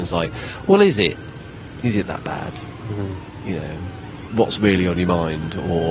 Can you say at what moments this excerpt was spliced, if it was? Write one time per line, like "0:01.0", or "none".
0:04.3

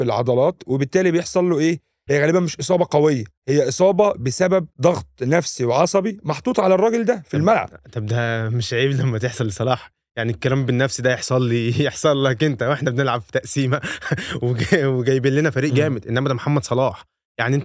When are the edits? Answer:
0:02.1
0:03.4
0:04.7

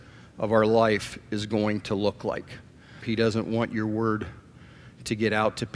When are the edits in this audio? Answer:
0:03.0

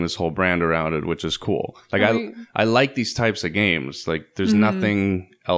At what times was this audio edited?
none

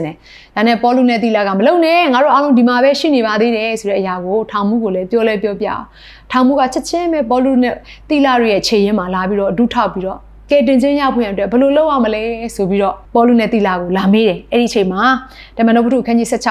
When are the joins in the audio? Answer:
0:13.0

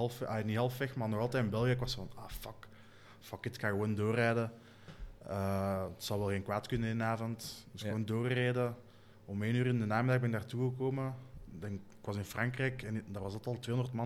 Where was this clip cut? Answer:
none

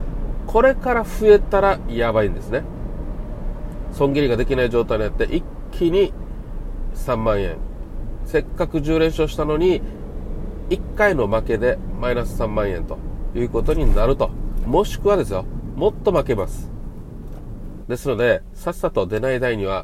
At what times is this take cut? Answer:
0:17.8

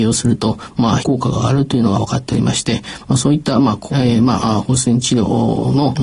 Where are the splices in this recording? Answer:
0:01.0
0:03.9

